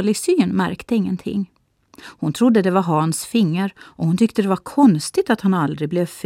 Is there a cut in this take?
no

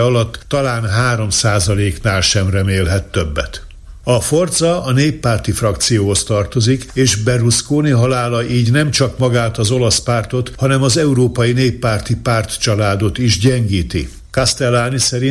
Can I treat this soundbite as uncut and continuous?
no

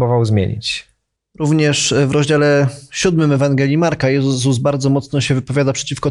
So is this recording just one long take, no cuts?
yes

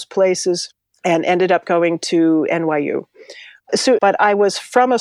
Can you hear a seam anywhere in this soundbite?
yes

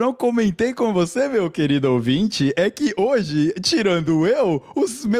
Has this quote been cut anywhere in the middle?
no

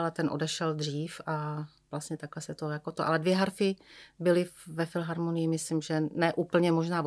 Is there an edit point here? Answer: no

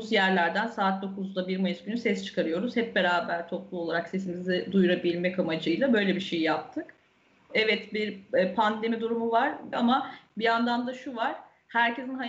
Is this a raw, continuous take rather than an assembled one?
no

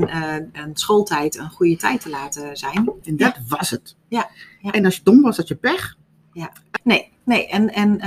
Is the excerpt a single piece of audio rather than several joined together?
no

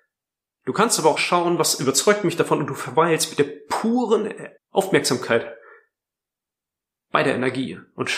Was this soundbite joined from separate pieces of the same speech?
yes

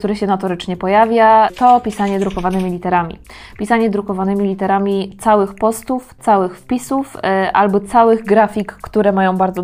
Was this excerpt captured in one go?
yes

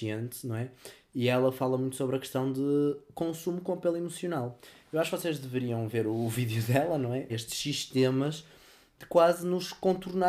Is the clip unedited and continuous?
no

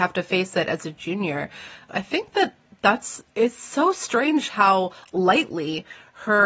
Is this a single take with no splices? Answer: no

